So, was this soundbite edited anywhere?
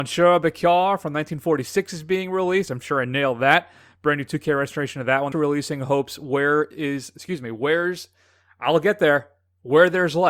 yes; 1 cut; at 5.3 s

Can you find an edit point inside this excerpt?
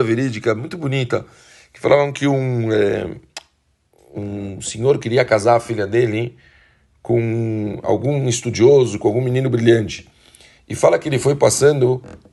no; 0 cuts

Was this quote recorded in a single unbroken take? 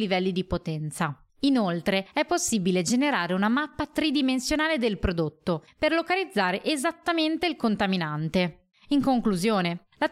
no; 2 cuts; at 1.3 s, 8.7 s

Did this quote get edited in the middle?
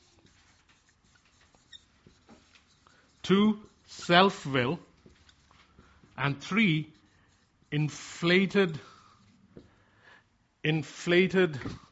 no; 0 cuts

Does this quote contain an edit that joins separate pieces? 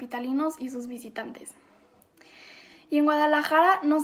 no; 0 cuts

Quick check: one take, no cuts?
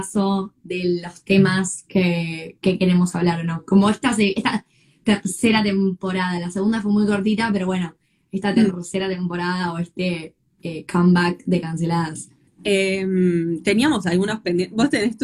no; 1 cut; at 12.5 s

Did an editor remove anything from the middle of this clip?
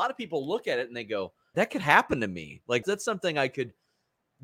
yes; 2 cuts; at 1.5 s, 2.8 s

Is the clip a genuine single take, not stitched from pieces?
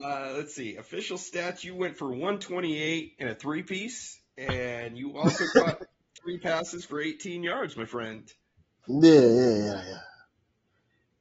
yes; 0 cuts

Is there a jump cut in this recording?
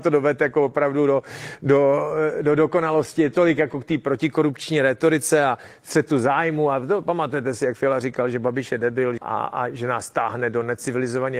yes; 1 cut; at 9.2 s

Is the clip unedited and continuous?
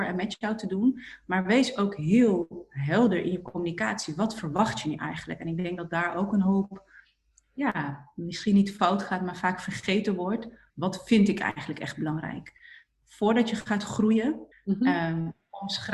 no; 2 cuts; at 10.7 s, 14.5 s

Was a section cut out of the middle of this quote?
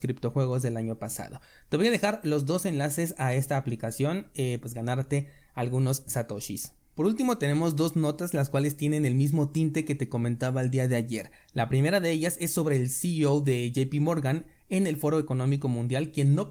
yes; 1 cut; at 4.6 s

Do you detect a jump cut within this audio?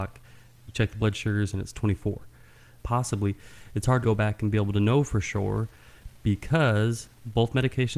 yes; 2 cuts; at 2.8 s, 4.0 s

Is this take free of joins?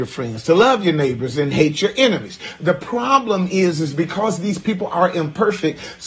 yes; 0 cuts

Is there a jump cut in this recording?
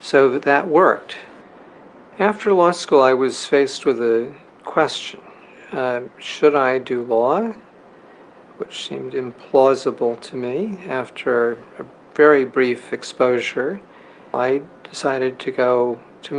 no; 0 cuts

